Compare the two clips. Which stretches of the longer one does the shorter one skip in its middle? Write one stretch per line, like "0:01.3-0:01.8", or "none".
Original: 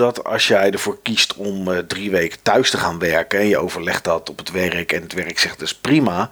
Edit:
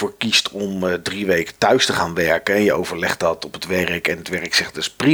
none